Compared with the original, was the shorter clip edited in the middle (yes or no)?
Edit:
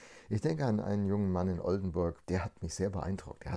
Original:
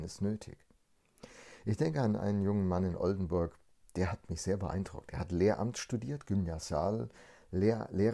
yes